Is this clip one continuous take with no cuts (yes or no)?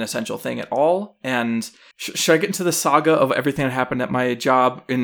no